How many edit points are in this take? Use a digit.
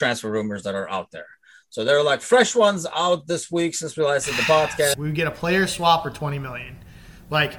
1